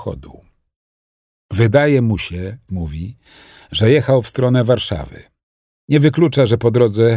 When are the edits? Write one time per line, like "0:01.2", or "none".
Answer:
0:02.7